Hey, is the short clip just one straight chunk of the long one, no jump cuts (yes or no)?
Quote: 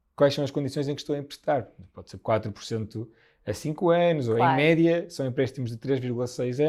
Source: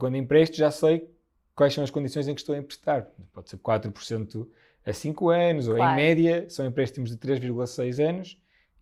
yes